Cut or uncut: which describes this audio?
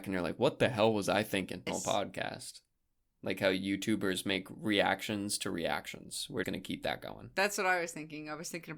cut